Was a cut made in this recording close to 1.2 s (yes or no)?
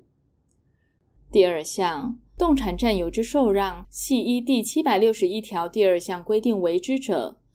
yes